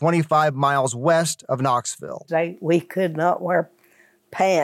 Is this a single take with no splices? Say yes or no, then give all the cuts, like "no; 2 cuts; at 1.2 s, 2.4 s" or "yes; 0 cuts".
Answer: no; 1 cut; at 2.3 s